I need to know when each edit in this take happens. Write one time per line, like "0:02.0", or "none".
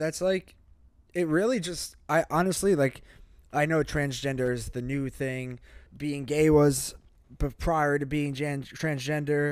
0:05.9